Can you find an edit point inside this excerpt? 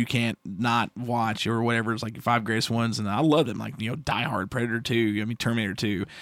no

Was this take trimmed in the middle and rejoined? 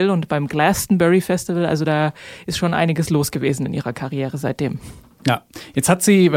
no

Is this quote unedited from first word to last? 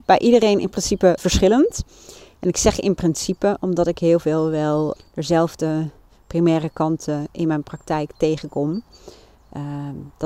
no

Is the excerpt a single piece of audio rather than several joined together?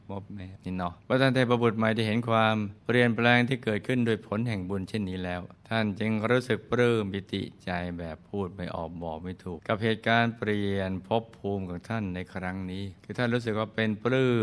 no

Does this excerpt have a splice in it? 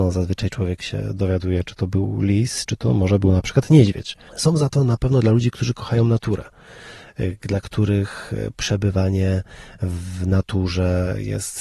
yes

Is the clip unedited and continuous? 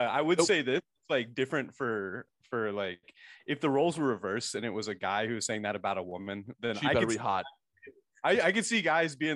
yes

